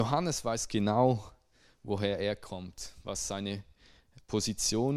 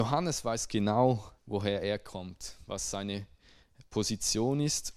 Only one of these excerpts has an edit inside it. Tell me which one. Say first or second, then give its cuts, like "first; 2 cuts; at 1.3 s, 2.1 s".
second; 1 cut; at 1.4 s